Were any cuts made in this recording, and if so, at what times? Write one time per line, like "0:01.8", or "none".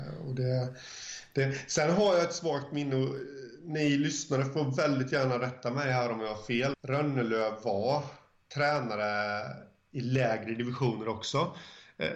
0:06.7